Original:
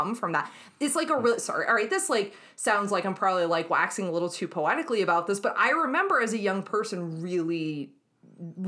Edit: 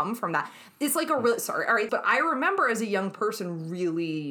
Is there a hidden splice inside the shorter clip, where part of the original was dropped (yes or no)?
yes